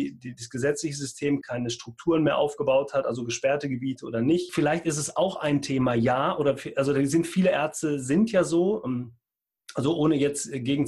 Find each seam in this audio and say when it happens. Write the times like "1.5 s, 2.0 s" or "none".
1.4 s, 4.5 s